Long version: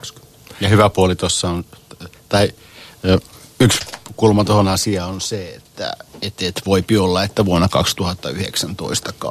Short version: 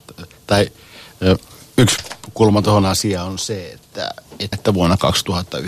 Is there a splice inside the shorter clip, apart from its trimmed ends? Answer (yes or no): yes